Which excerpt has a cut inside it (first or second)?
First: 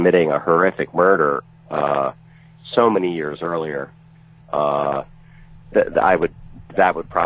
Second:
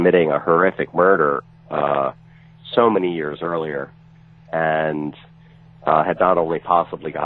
first